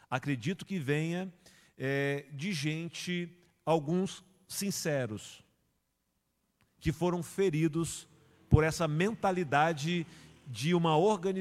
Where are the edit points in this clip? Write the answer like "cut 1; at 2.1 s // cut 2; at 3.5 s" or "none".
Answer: none